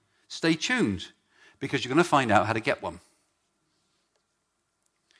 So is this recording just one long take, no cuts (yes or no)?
yes